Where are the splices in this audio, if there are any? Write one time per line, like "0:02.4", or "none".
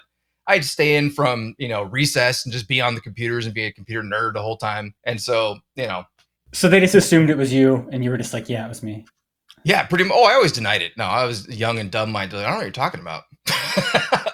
0:05.0